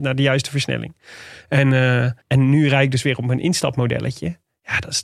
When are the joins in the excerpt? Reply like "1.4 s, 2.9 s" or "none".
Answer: 2.2 s